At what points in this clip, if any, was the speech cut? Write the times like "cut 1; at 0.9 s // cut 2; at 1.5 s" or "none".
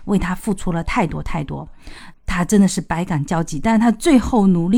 cut 1; at 2.1 s